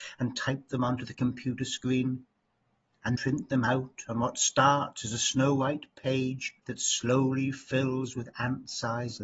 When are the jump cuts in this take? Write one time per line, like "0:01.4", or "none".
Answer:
0:03.2
0:06.6